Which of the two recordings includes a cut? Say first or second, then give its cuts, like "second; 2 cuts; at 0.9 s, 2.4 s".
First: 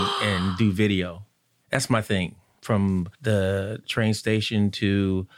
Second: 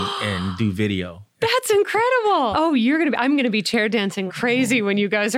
second; 3 cuts; at 1.3 s, 2.5 s, 4.3 s